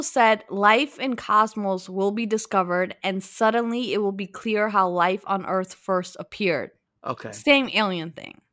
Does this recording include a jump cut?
yes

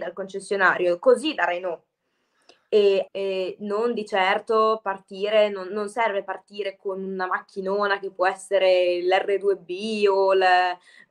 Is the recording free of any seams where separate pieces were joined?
no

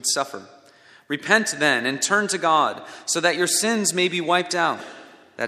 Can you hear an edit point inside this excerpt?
no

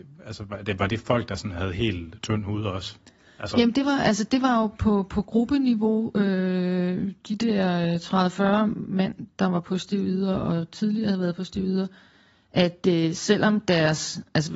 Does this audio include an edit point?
no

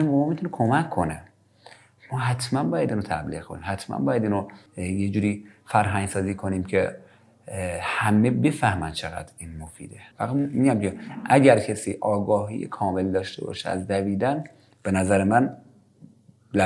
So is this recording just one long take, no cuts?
no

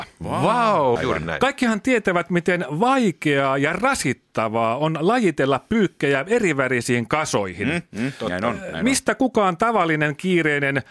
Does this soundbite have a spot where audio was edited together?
yes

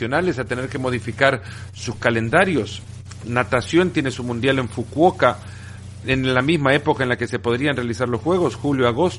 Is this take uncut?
no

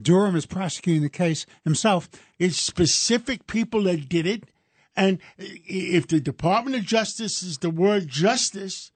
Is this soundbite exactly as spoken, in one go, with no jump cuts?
no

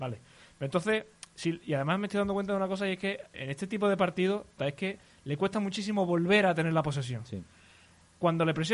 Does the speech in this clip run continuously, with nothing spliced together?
no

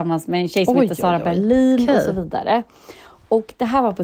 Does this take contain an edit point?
no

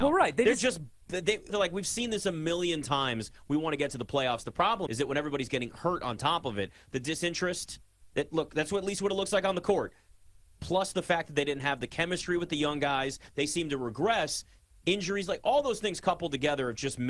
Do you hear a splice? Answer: yes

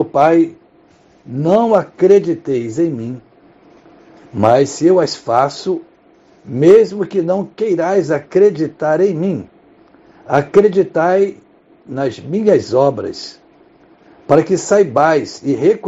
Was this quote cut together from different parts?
no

